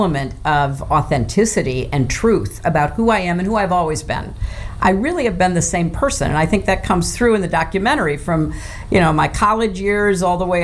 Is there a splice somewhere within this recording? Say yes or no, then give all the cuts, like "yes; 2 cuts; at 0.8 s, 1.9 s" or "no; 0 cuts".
no; 0 cuts